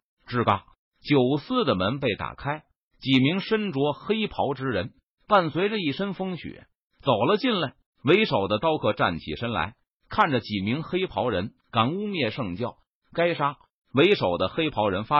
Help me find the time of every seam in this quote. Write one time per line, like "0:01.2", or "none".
0:07.9
0:11.6

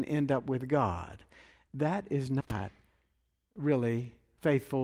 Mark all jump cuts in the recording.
0:01.7

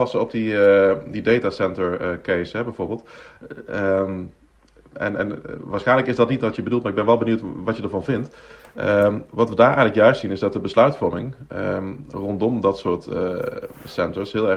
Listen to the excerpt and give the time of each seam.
none

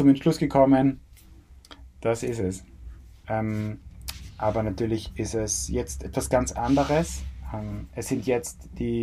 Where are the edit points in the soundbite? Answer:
0:03.2

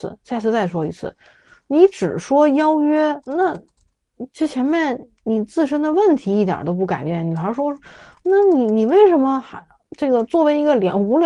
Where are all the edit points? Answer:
0:03.2

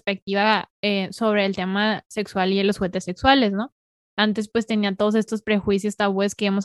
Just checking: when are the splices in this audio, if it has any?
none

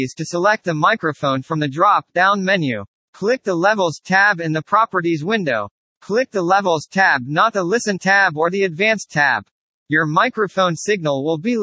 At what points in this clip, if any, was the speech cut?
0:09.8

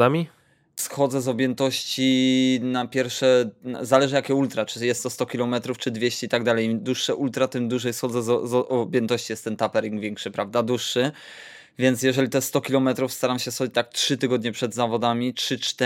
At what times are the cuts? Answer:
none

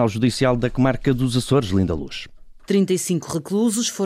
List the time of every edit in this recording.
0:02.6

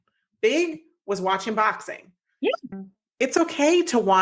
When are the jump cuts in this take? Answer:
0:02.7

